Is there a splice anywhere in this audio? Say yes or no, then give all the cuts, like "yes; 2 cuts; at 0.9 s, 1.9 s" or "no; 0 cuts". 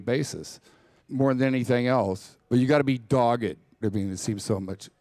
yes; 3 cuts; at 1.0 s, 2.4 s, 3.8 s